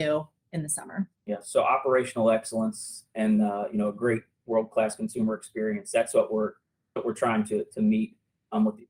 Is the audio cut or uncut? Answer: cut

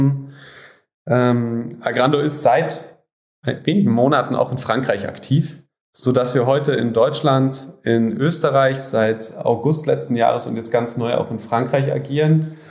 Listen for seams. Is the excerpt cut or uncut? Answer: uncut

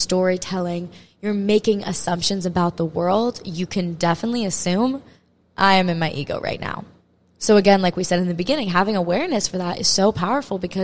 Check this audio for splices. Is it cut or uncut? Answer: uncut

